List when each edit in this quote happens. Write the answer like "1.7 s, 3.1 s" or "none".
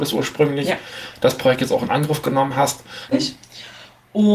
3.1 s